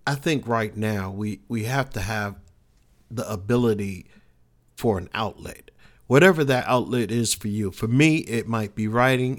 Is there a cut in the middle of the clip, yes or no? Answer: no